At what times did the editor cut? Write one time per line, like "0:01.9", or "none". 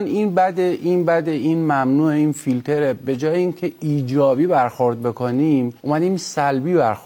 0:05.8